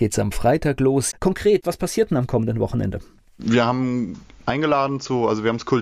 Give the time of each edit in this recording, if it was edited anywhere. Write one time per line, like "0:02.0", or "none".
0:01.1